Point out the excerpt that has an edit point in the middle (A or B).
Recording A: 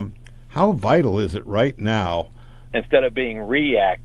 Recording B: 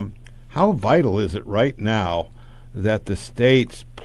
A